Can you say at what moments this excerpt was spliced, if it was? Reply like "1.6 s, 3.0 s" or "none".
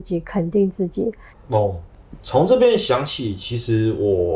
1.3 s